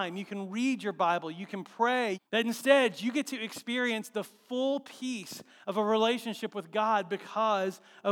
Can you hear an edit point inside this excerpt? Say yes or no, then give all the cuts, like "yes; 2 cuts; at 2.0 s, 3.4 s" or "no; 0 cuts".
yes; 1 cut; at 2.1 s